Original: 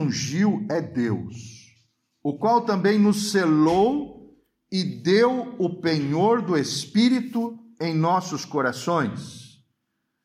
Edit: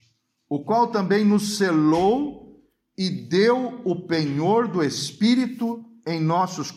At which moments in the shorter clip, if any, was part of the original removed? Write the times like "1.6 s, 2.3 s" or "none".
none